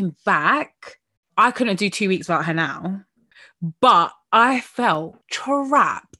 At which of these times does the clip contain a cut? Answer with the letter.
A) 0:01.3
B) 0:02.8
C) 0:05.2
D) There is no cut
C